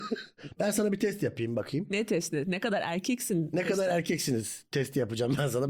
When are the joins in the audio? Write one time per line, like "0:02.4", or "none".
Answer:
none